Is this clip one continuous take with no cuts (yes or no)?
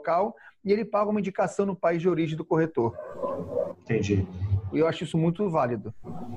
no